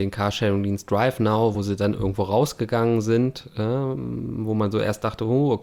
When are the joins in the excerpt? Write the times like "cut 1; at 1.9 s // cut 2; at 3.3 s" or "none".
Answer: none